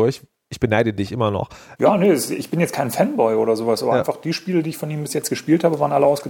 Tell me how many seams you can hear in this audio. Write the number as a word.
one